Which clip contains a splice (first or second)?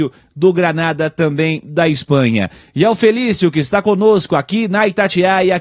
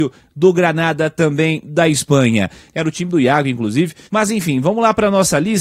second